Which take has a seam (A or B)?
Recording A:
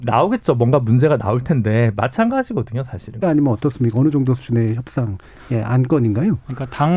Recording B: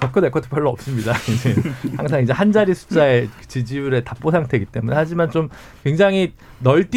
A